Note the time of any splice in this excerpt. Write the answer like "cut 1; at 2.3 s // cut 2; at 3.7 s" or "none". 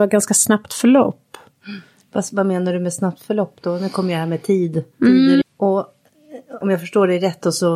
cut 1; at 5.4 s // cut 2; at 6.6 s